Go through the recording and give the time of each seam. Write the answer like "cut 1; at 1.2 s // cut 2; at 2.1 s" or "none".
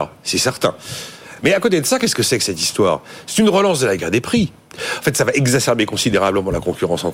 none